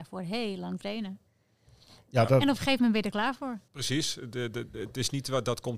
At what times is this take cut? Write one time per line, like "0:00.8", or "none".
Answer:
0:03.7